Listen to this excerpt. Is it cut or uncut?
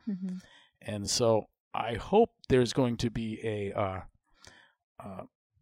uncut